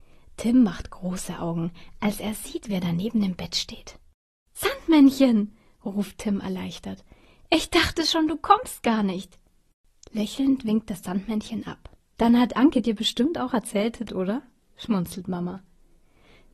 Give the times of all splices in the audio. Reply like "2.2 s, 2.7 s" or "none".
12.2 s, 14.1 s